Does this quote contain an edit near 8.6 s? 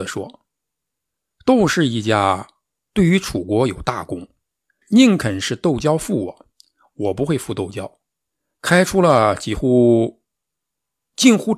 no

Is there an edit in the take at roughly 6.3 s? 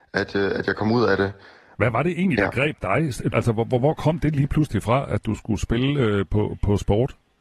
no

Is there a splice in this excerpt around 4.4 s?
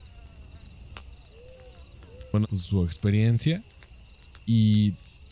no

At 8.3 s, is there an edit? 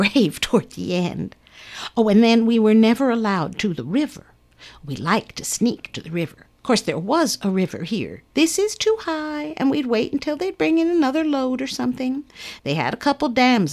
yes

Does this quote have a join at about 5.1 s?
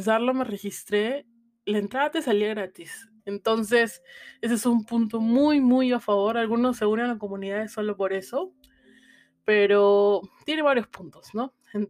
no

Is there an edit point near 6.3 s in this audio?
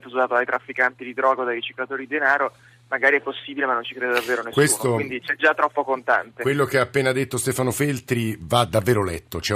no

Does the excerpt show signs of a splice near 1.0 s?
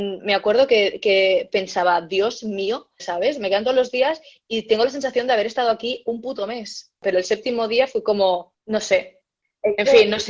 no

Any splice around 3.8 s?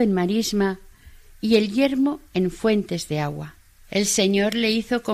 yes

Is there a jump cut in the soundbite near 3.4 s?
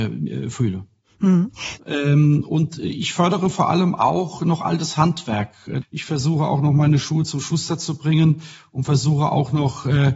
no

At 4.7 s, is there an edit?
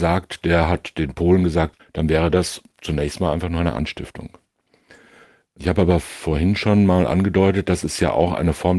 no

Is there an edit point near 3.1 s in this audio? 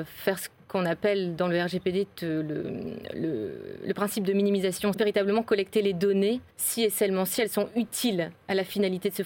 no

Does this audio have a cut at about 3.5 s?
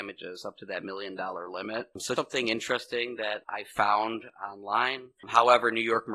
no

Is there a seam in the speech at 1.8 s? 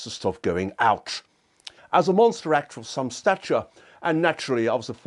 yes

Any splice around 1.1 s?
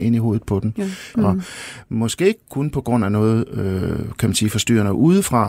yes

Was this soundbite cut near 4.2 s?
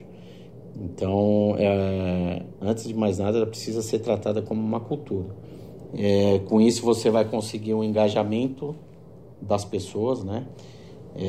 no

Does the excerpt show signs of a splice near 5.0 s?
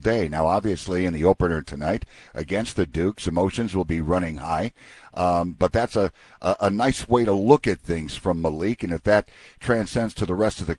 no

